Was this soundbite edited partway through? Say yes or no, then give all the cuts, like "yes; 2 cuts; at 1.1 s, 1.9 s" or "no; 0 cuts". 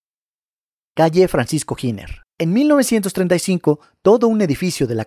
yes; 1 cut; at 2.3 s